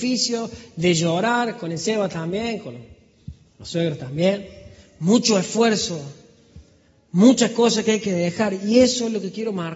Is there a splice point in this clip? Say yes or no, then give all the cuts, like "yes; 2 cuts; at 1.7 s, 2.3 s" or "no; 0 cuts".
no; 0 cuts